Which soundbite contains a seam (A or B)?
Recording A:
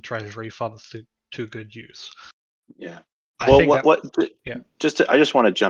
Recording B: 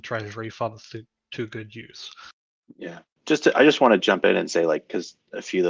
B